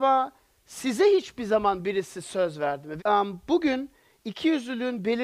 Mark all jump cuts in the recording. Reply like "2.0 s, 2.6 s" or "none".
3.0 s